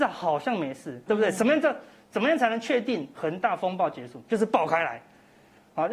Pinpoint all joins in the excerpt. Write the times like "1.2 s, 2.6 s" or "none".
1.1 s